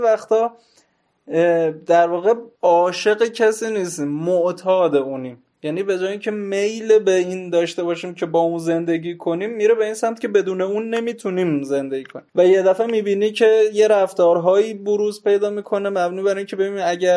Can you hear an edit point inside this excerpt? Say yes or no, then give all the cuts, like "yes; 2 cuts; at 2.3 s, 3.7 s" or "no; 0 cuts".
yes; 2 cuts; at 2.5 s, 12.3 s